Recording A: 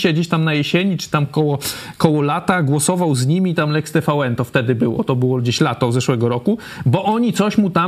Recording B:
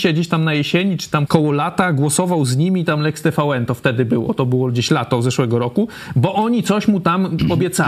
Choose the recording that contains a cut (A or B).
B